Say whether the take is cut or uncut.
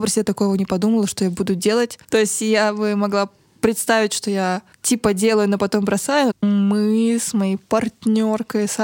cut